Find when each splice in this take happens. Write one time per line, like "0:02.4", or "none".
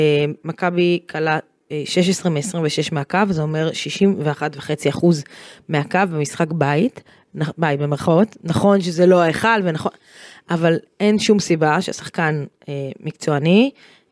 none

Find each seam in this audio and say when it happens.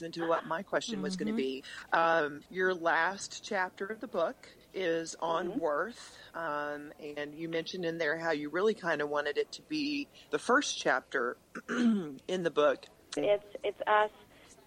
0:13.2

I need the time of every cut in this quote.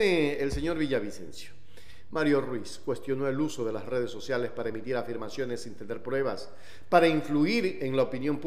0:02.1

